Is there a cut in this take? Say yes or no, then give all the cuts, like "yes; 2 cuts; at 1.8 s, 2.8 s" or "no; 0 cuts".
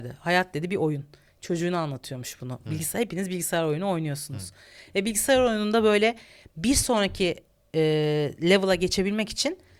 no; 0 cuts